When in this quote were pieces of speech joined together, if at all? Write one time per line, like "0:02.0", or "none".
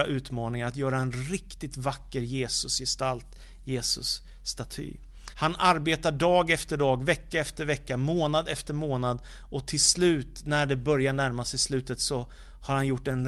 0:05.3